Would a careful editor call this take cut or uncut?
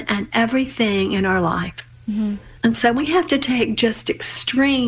cut